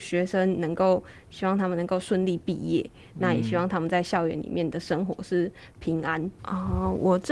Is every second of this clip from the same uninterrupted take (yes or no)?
no